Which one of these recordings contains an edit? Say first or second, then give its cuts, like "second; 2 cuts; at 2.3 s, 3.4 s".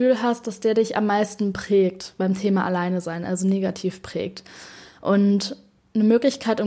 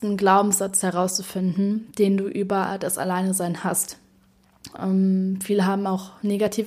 second; 1 cut; at 4.8 s